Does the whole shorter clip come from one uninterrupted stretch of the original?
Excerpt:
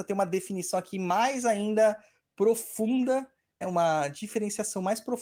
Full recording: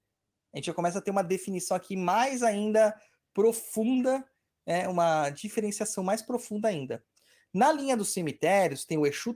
no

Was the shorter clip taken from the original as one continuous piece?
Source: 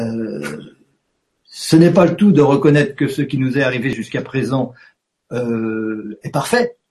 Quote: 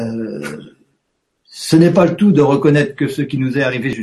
yes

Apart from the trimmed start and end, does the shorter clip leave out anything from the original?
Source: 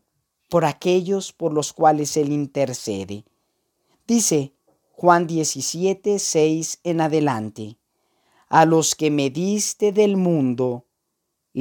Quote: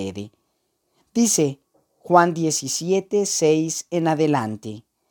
no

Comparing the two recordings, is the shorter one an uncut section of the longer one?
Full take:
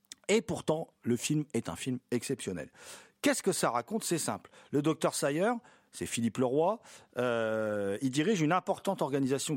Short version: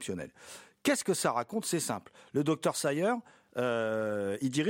no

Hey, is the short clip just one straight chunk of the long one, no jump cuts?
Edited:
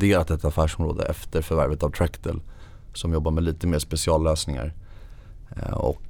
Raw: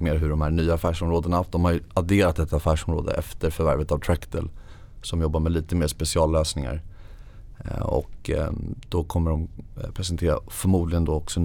yes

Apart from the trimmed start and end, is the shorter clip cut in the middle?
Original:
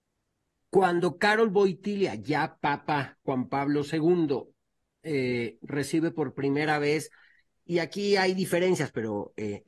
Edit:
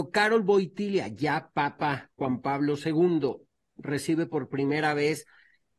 yes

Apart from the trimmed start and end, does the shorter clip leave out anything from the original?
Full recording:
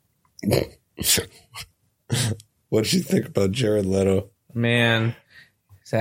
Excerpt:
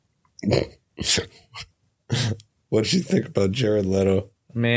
no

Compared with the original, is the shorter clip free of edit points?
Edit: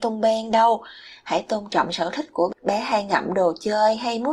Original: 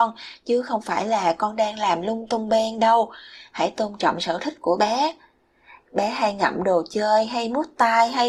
no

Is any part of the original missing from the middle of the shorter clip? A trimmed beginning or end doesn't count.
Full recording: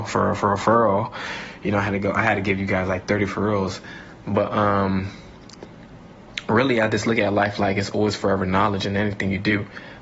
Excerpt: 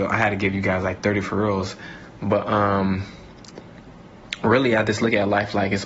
no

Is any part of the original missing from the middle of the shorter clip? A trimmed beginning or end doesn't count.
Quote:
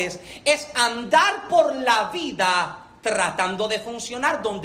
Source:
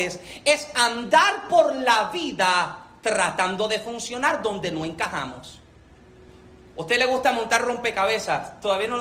no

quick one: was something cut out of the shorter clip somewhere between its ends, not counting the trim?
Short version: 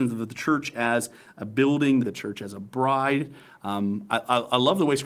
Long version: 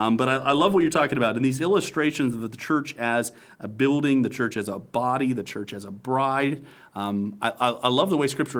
yes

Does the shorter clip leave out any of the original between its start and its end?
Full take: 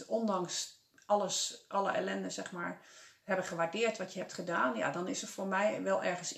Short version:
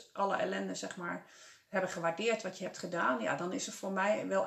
no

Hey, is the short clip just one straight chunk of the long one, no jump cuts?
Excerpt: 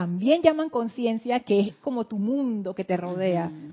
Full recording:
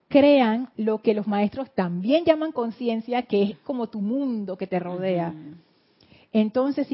yes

